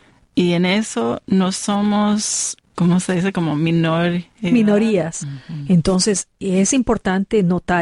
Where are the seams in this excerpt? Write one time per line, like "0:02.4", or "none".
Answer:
0:02.6
0:05.2

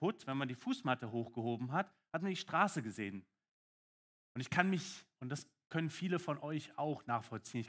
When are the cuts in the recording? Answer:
0:04.2

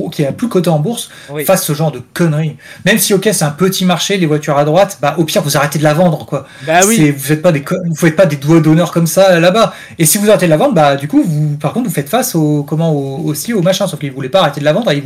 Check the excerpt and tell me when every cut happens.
none

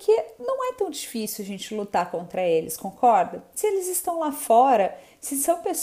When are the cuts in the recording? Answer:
none

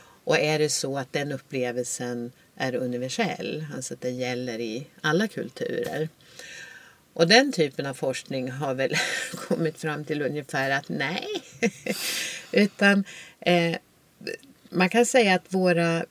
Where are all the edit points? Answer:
none

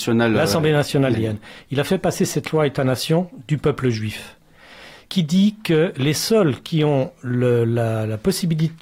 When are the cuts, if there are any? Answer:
0:01.1

